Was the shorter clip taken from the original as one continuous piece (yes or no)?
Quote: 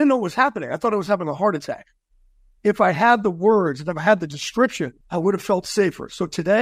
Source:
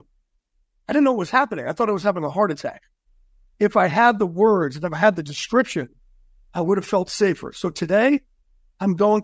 no